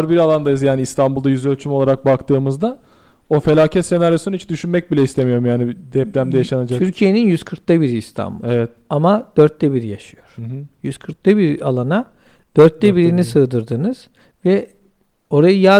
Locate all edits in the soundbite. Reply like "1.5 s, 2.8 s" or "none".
none